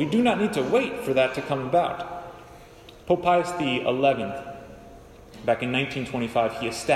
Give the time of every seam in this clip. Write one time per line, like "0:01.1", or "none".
0:03.0